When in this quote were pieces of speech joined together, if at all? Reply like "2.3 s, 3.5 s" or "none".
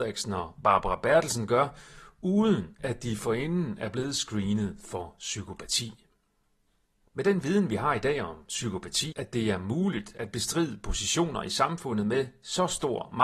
7.0 s, 9.1 s